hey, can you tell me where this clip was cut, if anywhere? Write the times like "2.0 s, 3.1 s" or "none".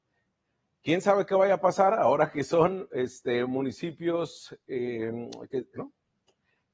5.8 s